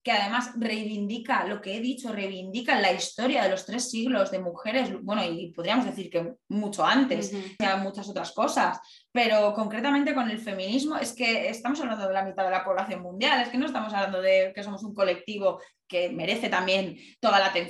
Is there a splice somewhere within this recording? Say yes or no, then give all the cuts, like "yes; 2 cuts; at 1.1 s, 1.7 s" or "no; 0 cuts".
yes; 1 cut; at 7.6 s